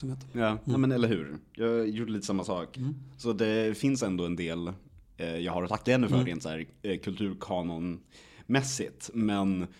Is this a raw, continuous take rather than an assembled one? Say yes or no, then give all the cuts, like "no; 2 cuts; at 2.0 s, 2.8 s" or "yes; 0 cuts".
no; 1 cut; at 2.8 s